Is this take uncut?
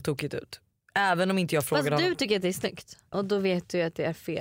no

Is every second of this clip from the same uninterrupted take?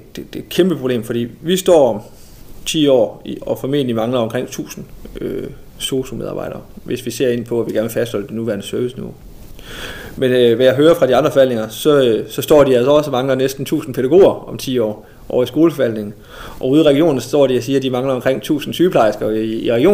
yes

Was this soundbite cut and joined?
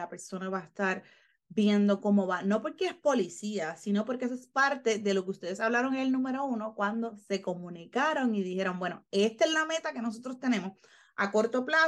no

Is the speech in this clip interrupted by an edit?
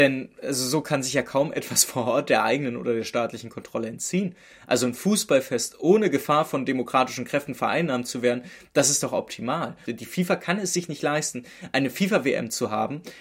yes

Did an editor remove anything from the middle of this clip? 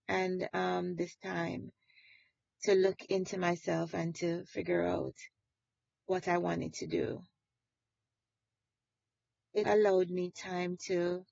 yes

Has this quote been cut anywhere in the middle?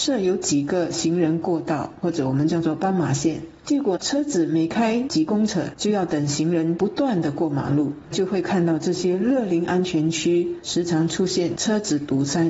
no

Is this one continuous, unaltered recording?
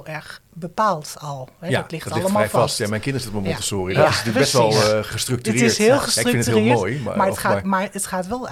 yes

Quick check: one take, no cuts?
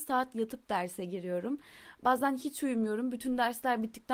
yes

